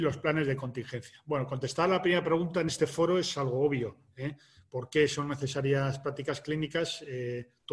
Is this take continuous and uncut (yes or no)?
yes